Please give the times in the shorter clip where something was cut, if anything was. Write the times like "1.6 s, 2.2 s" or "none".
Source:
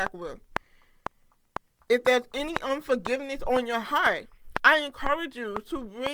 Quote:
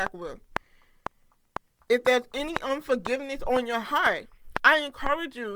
none